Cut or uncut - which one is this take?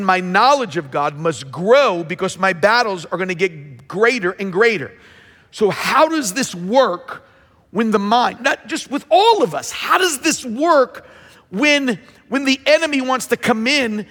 cut